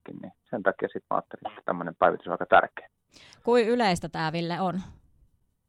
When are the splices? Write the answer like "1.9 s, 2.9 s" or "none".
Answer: none